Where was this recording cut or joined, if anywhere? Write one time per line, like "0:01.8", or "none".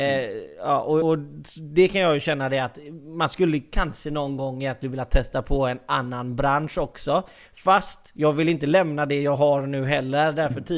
0:01.0